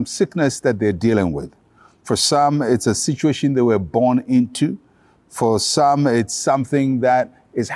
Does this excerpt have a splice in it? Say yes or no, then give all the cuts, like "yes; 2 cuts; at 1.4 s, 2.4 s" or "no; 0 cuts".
no; 0 cuts